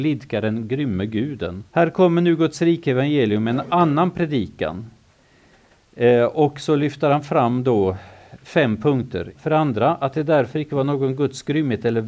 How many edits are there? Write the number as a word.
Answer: two